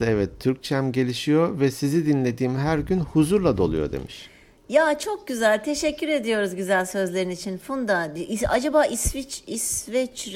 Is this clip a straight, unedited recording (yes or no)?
yes